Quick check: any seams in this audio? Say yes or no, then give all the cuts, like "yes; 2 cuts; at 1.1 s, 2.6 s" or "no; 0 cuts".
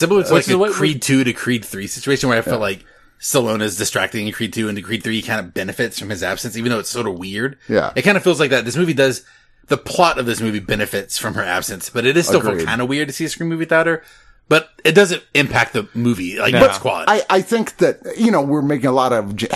no; 0 cuts